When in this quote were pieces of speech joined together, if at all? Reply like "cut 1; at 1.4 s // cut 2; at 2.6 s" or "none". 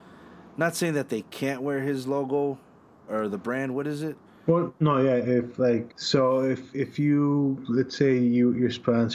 cut 1; at 3.1 s // cut 2; at 4.3 s // cut 3; at 5.9 s